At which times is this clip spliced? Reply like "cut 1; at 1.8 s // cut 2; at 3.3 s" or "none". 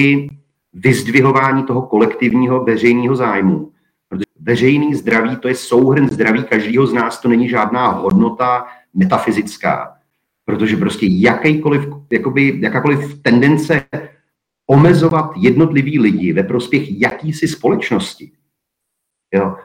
cut 1; at 4.2 s